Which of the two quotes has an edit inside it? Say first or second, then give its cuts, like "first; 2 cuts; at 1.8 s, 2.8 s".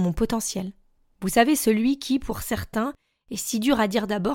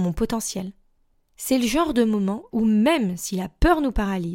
first; 1 cut; at 1.1 s